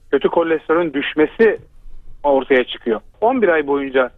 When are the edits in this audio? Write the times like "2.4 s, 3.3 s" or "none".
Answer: 3.1 s